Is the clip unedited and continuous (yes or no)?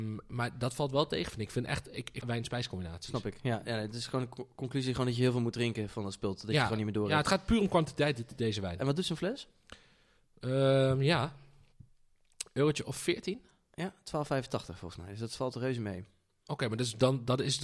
no